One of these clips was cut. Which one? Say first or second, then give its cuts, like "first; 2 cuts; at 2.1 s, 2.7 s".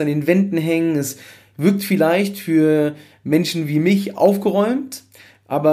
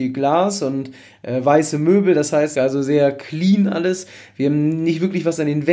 second; 1 cut; at 2.5 s